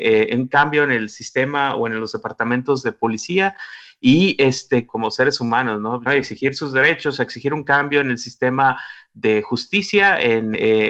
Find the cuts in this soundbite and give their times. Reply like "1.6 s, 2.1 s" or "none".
4.9 s, 6.1 s

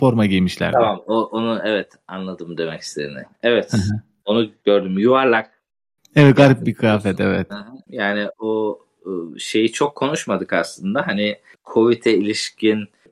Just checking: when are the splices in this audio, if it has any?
7.9 s

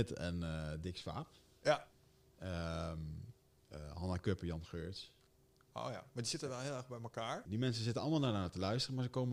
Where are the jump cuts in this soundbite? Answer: 7.5 s

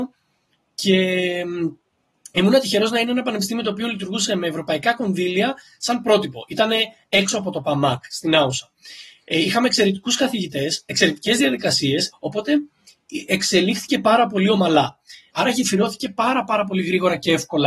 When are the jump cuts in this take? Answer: 12.1 s, 15.3 s

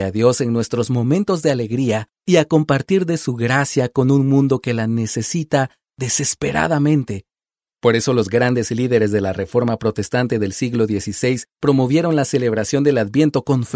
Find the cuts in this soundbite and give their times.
7.7 s

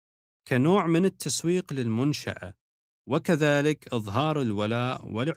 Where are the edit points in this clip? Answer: none

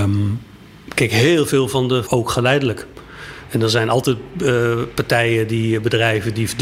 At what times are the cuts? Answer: 2.1 s

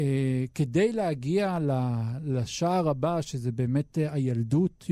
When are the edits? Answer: none

